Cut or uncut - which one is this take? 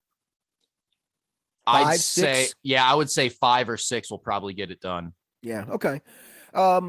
uncut